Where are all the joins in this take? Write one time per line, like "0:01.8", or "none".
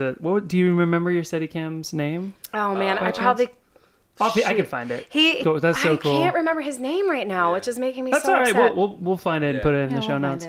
0:05.4